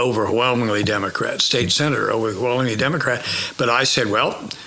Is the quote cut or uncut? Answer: uncut